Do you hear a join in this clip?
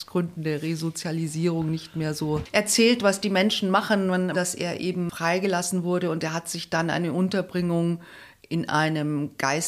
yes; 1 cut; at 4.3 s

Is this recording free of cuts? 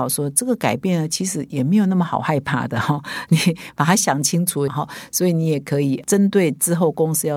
no; 1 cut; at 4.7 s

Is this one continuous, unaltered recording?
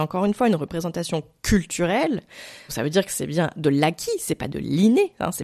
no; 1 cut; at 2.7 s

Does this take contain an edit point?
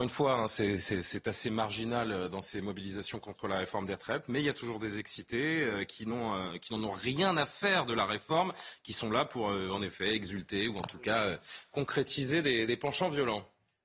no; 0 cuts

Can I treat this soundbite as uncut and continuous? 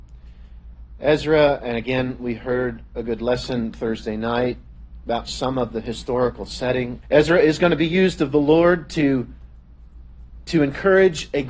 no; 1 cut; at 7.0 s

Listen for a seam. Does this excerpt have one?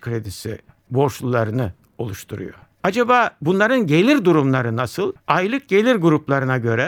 yes; 1 cut; at 5.2 s

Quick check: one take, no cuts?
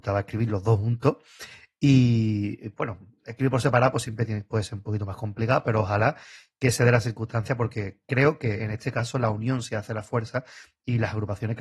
yes; 0 cuts

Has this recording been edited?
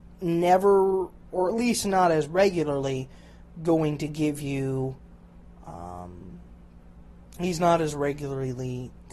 no; 0 cuts

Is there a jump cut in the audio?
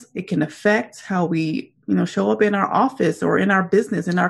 no; 0 cuts

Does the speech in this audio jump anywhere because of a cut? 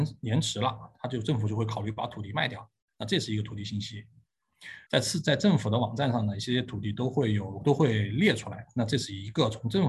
yes; 1 cut; at 4.9 s

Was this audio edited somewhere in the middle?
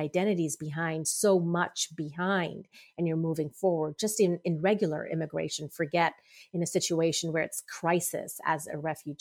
no; 0 cuts

